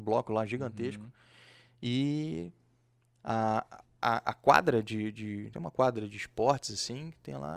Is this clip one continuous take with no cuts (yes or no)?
yes